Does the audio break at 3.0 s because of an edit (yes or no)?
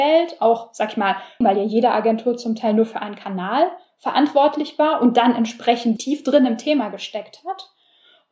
no